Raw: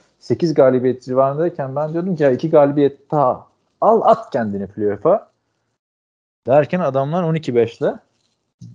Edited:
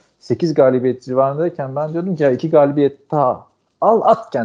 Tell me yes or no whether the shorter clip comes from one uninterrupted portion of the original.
yes